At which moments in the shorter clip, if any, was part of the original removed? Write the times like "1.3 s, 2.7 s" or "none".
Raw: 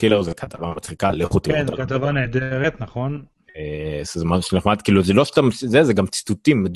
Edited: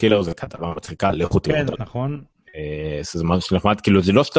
1.8 s